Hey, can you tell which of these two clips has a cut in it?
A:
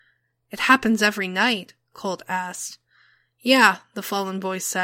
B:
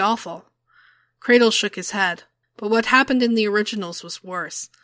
B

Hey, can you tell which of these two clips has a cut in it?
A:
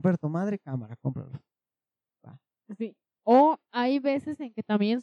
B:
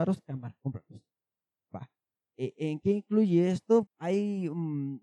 B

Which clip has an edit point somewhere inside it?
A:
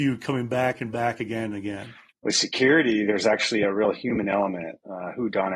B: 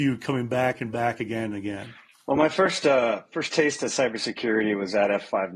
A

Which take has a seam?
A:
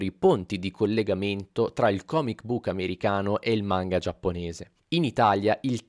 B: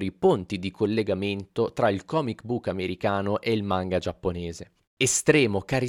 B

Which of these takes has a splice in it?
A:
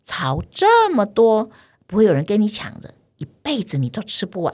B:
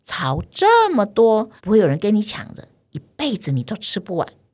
B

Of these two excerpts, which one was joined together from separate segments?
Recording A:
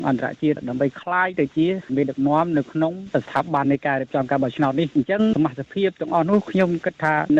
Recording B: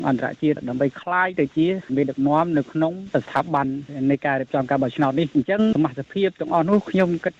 A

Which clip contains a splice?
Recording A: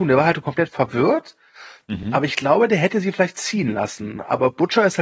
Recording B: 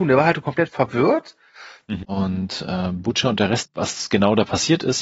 B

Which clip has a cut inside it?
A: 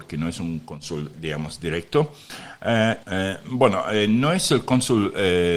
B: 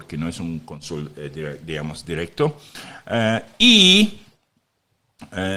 A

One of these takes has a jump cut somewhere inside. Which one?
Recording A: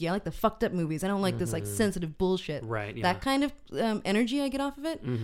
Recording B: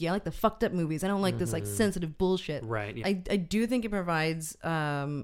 B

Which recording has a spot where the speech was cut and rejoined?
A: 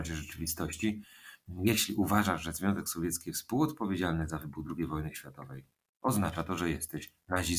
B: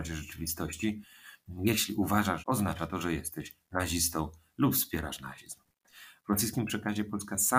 B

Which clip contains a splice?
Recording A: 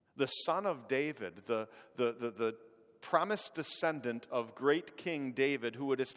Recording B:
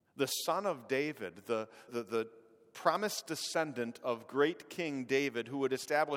B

